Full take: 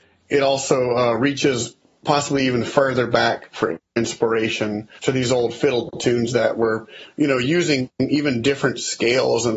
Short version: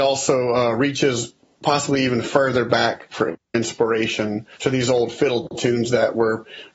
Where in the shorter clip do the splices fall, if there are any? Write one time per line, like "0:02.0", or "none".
none